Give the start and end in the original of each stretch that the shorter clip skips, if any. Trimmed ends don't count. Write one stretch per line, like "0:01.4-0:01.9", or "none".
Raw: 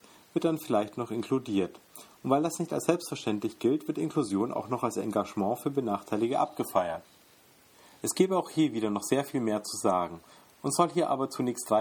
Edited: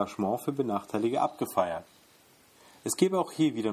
none